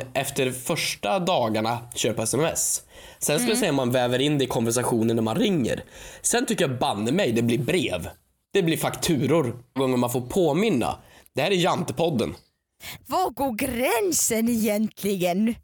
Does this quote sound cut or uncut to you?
cut